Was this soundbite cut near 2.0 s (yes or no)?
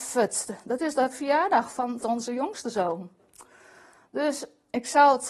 yes